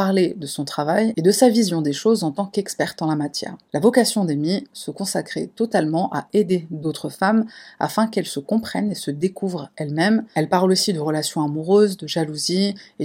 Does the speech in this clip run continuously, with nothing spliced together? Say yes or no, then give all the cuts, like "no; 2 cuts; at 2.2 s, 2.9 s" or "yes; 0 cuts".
no; 1 cut; at 10.3 s